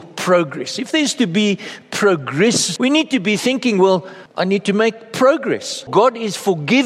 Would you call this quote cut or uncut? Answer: cut